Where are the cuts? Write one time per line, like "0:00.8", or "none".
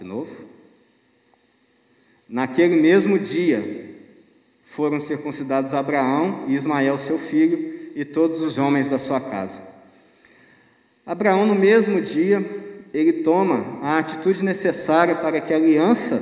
none